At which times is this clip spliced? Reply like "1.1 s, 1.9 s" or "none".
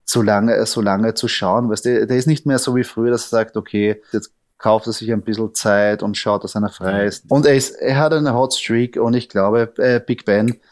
4.1 s, 7.3 s